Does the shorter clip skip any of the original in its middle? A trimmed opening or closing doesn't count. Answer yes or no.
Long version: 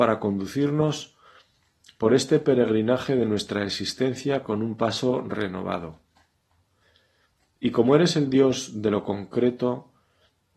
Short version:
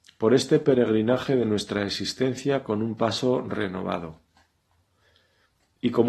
no